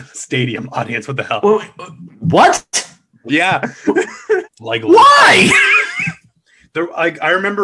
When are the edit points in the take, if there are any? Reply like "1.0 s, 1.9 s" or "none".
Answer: 1.4 s, 4.4 s